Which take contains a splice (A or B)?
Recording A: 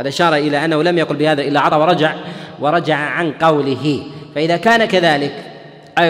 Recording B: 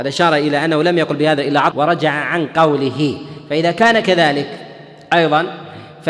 B